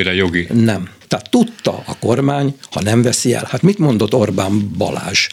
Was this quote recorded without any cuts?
no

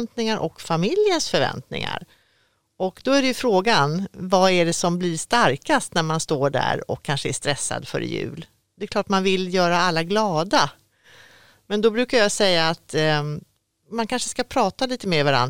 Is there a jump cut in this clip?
no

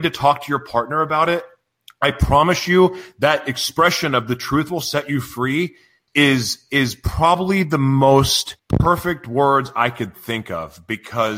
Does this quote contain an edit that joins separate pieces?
yes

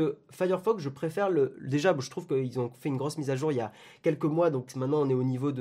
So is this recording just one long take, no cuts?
yes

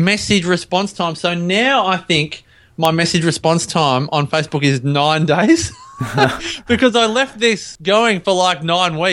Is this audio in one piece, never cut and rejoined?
yes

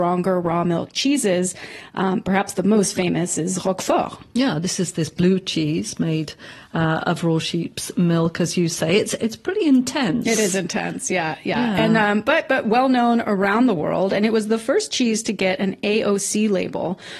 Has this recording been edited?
no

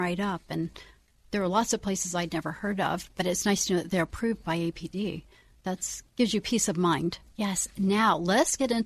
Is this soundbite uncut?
no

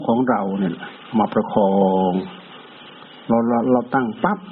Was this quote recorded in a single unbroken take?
yes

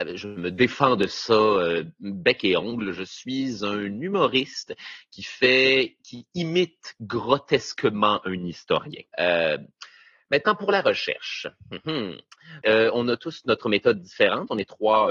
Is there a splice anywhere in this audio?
no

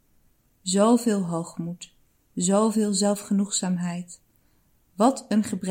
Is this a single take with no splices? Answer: yes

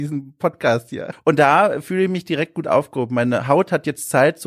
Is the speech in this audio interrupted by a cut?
yes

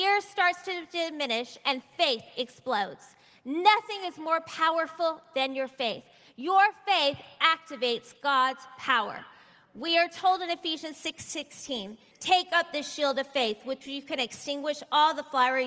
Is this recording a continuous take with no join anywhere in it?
no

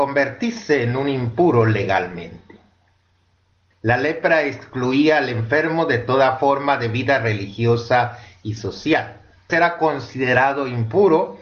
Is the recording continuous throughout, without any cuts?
no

